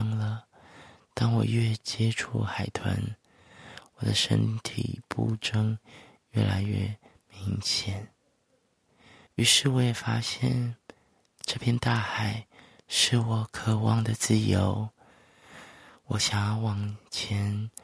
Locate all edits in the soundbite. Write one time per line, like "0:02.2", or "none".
none